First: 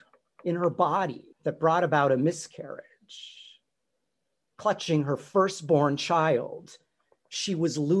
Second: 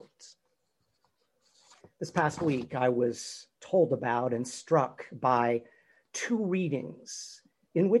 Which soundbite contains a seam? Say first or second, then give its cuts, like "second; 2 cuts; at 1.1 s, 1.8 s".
first; 1 cut; at 1.3 s